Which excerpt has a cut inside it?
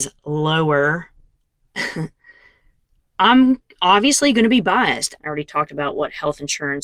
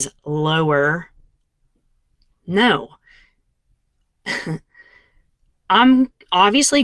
first; 2 cuts; at 1.7 s, 5.2 s

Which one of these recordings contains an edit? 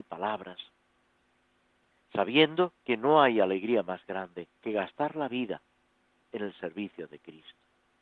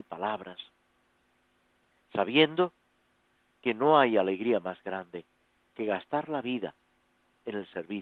first; 2 cuts; at 2.8 s, 4.6 s

